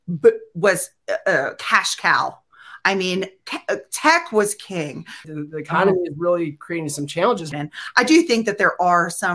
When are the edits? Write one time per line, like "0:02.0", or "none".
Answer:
0:05.2
0:07.5